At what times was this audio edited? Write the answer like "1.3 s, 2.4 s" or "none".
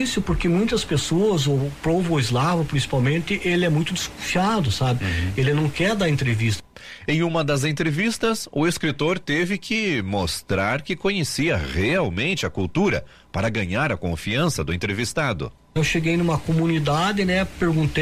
none